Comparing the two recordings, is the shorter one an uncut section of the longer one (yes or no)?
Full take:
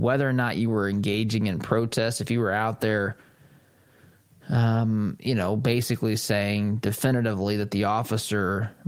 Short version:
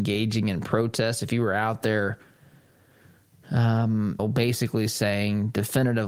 no